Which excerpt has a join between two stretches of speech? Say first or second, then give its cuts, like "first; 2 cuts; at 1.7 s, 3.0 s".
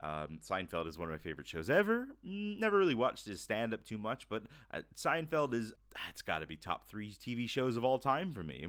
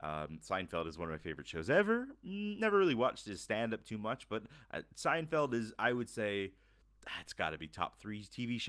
first; 1 cut; at 5.8 s